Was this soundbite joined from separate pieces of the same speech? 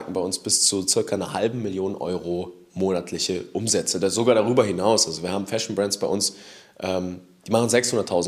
no; 0 cuts

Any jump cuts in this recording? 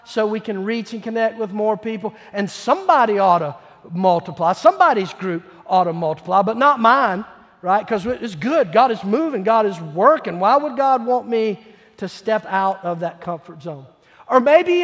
no; 0 cuts

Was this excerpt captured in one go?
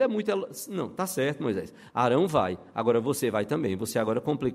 yes; 0 cuts

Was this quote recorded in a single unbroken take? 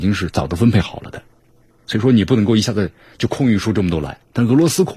yes; 0 cuts

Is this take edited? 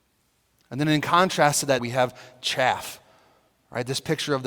yes; 1 cut; at 1.8 s

